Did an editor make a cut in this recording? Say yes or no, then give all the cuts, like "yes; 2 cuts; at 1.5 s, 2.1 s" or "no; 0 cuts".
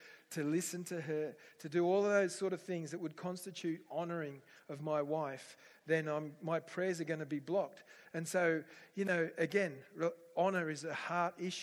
no; 0 cuts